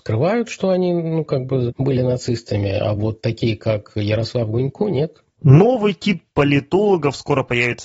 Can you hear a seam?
no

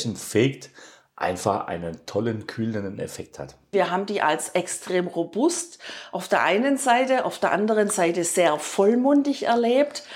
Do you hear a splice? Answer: yes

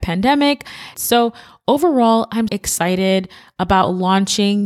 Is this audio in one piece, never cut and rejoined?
no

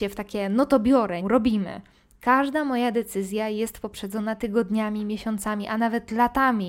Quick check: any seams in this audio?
yes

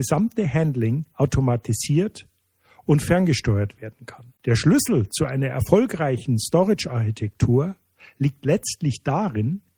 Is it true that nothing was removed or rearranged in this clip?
no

